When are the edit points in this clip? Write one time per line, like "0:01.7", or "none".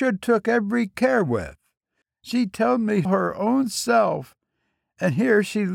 0:02.0
0:03.0